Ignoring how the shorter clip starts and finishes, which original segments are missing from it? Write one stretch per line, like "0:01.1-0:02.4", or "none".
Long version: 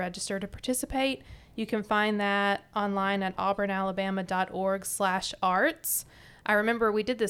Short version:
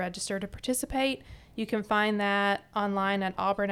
none